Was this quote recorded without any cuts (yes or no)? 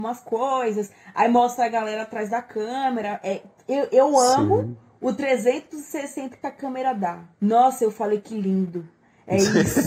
no